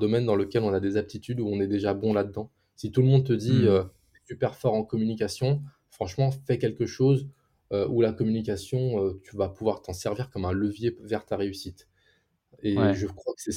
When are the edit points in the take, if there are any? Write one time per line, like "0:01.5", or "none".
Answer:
none